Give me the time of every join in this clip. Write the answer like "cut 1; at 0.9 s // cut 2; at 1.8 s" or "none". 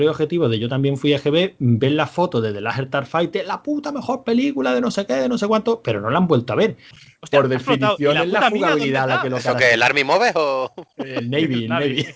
cut 1; at 6.9 s